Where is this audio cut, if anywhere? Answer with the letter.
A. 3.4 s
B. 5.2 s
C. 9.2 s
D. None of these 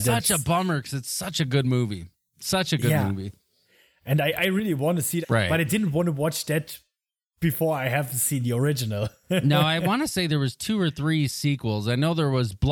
B